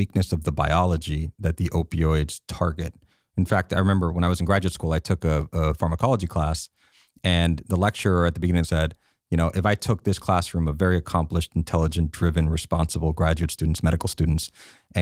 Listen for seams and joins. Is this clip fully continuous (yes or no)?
yes